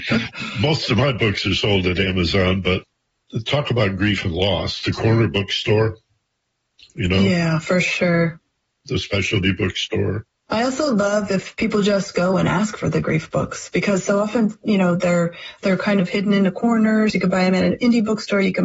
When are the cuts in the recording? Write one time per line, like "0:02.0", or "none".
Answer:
0:17.1